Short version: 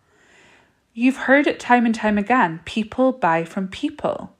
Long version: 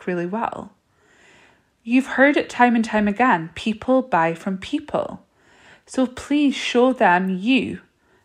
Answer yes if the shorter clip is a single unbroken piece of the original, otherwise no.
yes